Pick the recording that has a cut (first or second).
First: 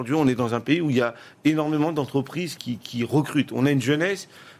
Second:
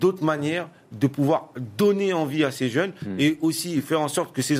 first